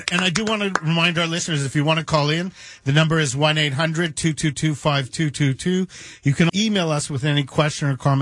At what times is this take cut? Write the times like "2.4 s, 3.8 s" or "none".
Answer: 6.5 s